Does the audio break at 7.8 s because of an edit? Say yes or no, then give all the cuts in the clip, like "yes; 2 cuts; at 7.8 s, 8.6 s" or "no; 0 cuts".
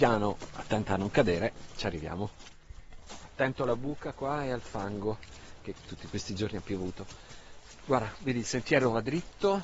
no; 0 cuts